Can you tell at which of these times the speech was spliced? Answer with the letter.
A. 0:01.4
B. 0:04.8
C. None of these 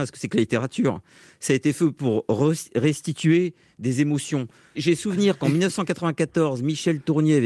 B